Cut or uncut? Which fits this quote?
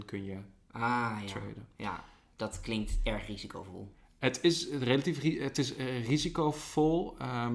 uncut